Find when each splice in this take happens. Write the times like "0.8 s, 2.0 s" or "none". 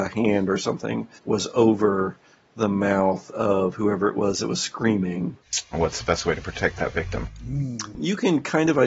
1.2 s, 5.7 s